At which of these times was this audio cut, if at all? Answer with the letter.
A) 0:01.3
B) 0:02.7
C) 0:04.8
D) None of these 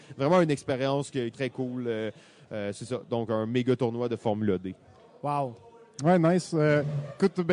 A